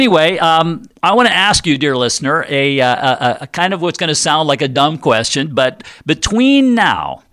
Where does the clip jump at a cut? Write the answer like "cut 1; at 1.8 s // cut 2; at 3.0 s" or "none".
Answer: cut 1; at 1.0 s